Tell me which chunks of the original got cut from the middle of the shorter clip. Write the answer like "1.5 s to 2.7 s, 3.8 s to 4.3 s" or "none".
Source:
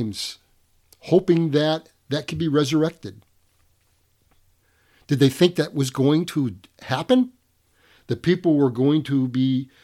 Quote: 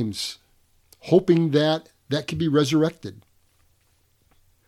none

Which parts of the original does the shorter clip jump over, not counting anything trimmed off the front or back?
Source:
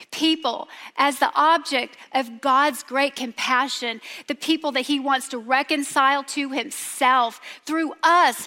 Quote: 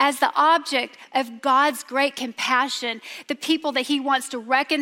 none

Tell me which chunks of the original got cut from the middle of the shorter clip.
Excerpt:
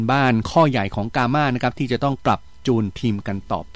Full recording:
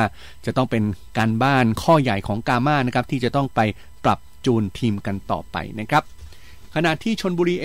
3.5 s to 4.0 s

